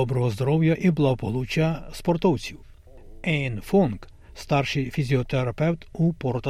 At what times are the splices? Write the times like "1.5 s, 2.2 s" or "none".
none